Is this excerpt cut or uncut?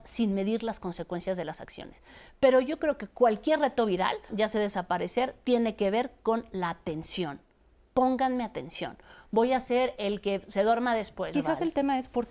cut